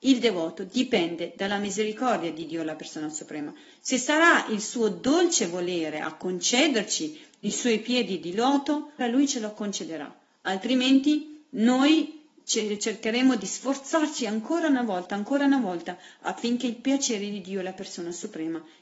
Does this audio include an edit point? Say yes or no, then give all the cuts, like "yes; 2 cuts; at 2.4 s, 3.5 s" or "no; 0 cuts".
yes; 1 cut; at 9.0 s